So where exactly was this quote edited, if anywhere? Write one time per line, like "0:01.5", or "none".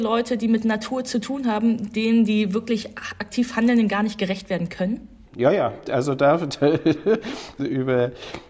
0:05.3
0:07.6